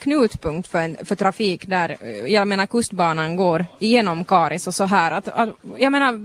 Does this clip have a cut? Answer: no; 0 cuts

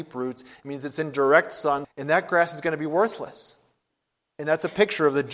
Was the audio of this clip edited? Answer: yes; 1 cut; at 1.8 s

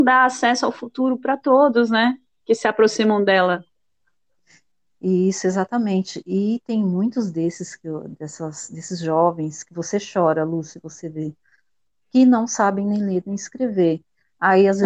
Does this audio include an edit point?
no; 0 cuts

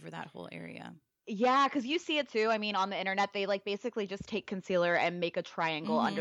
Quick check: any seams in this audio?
no; 0 cuts

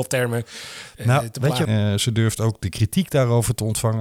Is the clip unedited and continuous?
no; 1 cut; at 1.7 s

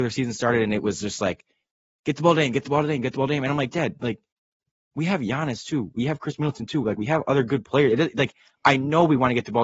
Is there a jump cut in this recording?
no; 0 cuts

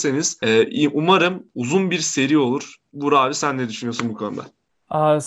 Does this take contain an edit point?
no; 0 cuts

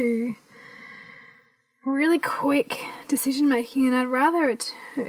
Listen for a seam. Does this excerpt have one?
no; 0 cuts

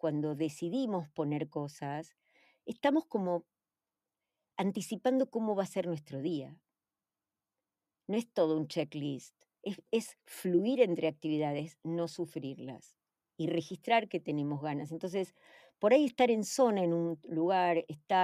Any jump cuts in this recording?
no; 0 cuts

